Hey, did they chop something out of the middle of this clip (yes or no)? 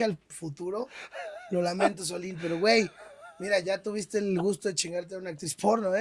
no